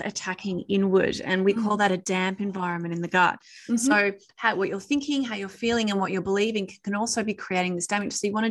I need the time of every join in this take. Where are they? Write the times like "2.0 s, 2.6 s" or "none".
none